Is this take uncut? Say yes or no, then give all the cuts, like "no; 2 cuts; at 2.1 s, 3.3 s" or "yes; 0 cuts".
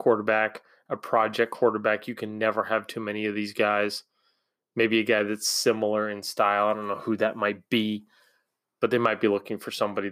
yes; 0 cuts